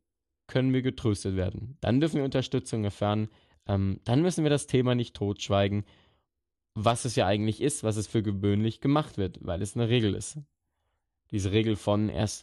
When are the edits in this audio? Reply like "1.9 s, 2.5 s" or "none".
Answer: 1.8 s